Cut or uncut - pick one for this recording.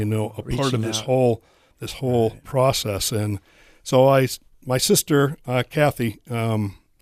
uncut